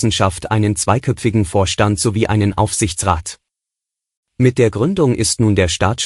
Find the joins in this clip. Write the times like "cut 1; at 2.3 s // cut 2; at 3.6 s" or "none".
none